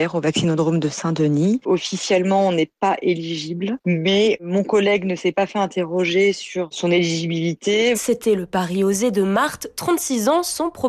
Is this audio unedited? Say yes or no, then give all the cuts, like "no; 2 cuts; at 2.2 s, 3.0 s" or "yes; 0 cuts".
no; 1 cut; at 7.9 s